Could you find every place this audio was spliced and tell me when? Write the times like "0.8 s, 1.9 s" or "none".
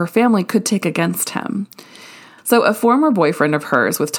2.4 s